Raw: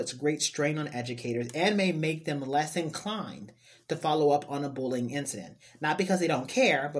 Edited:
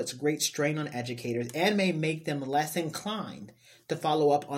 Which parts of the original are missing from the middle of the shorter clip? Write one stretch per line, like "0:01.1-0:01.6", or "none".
none